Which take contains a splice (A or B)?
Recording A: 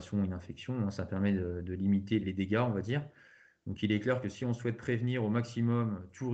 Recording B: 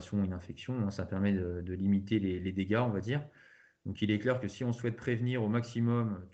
A